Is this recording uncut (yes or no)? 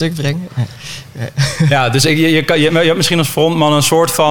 yes